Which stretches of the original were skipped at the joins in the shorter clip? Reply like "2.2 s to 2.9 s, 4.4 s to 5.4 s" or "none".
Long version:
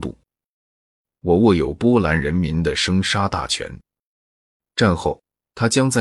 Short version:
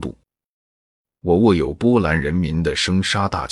none